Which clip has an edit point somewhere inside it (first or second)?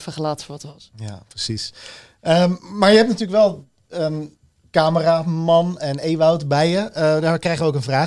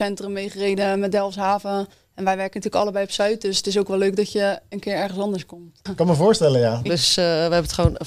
second